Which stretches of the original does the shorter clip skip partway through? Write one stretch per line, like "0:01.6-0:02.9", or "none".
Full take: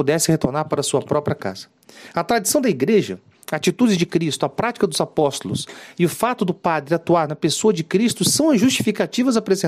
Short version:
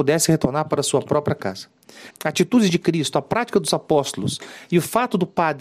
0:02.1-0:03.4